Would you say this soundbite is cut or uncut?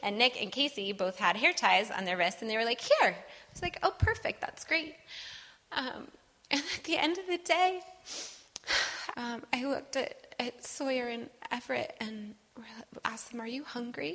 cut